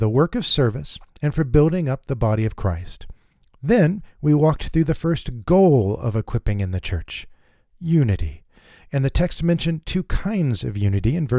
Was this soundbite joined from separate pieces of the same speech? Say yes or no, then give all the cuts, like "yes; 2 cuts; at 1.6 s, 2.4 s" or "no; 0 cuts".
no; 0 cuts